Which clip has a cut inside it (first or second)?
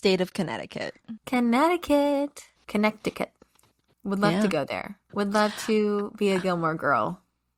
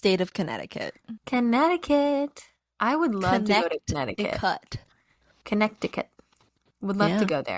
first